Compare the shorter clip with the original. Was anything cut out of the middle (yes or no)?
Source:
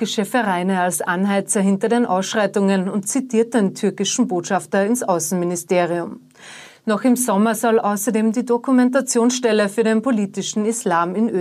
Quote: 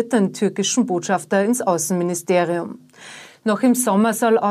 no